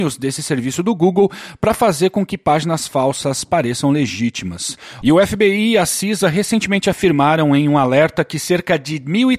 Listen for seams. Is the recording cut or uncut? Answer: cut